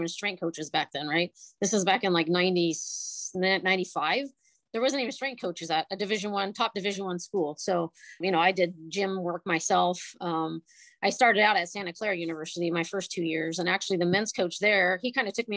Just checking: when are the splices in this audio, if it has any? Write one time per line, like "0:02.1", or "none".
0:08.2